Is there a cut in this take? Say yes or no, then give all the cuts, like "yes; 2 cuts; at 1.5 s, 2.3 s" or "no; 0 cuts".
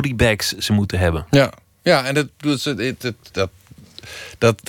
no; 0 cuts